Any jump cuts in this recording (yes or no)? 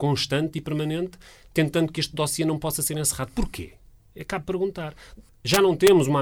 yes